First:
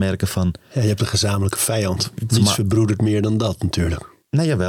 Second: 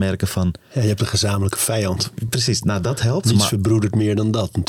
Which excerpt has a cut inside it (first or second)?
first